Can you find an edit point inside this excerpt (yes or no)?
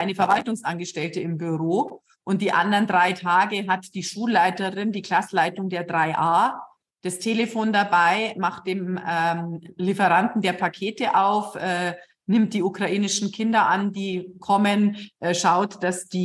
no